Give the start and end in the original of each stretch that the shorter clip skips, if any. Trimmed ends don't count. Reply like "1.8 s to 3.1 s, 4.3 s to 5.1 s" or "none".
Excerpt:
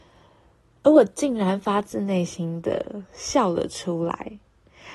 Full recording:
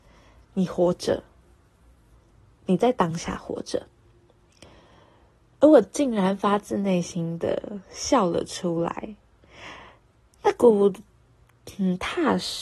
none